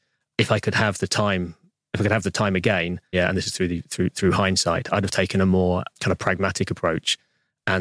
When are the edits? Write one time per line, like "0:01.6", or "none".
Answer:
0:03.1